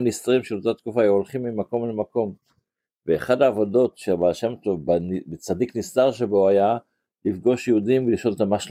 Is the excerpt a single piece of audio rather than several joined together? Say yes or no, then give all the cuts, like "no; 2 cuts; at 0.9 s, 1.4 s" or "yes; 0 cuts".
yes; 0 cuts